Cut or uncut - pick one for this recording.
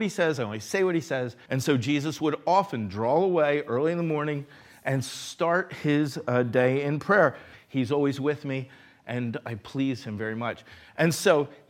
cut